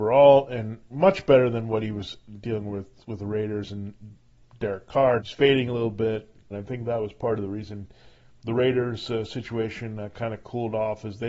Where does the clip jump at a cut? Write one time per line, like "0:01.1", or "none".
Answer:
0:05.2
0:06.5